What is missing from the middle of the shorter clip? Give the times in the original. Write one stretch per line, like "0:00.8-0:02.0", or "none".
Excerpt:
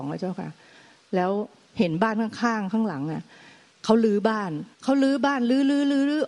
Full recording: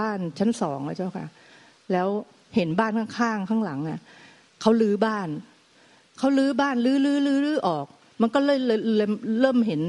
0:05.5-0:06.1